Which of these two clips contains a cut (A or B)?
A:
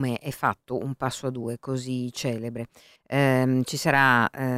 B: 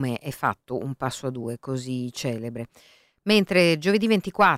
A